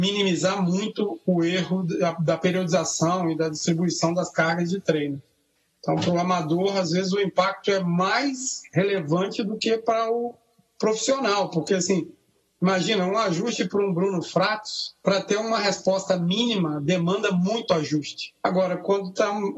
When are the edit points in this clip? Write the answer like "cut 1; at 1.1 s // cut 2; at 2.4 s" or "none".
none